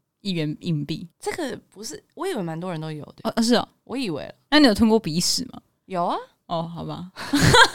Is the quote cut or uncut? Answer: cut